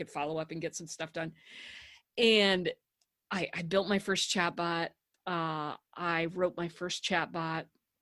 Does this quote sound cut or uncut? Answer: cut